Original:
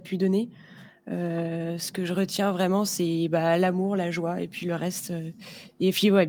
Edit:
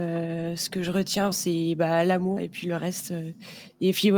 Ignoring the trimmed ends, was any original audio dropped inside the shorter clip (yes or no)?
yes